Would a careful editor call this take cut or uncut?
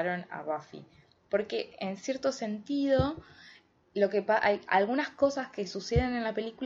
uncut